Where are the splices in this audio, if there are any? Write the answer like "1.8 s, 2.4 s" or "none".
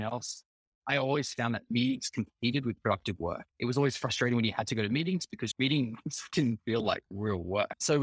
3.5 s